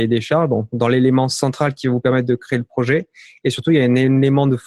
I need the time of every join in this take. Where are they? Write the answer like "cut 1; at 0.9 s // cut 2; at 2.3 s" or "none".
cut 1; at 3.4 s